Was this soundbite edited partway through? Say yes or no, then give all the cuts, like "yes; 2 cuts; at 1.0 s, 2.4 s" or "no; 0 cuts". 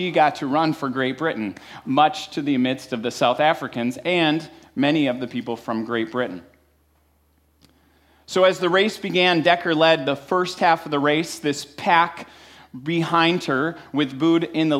no; 0 cuts